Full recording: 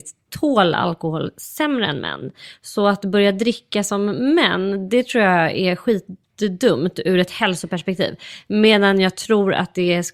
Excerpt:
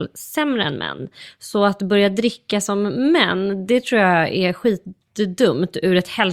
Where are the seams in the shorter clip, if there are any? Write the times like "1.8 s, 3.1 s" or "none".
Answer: none

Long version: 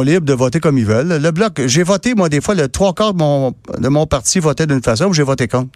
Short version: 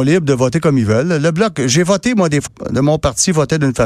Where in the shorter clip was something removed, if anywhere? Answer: 2.5 s

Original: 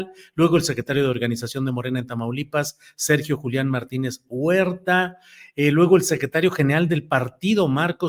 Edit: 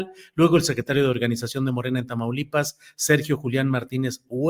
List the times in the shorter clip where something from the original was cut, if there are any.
none

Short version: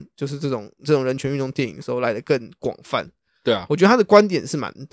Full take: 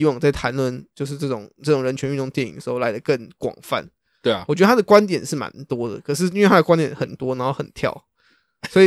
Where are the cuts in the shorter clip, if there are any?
none

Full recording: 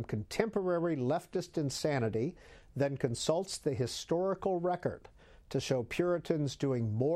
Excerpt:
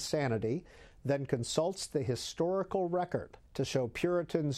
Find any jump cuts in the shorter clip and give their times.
3.5 s

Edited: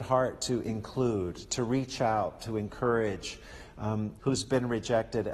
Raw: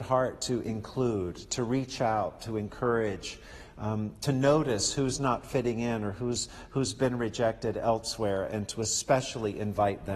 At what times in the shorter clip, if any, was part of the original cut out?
4.2 s

